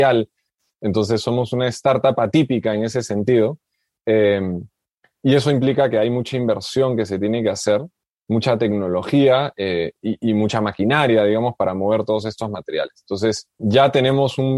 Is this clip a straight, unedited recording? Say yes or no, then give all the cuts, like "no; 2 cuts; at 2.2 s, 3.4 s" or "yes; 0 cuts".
no; 1 cut; at 13.6 s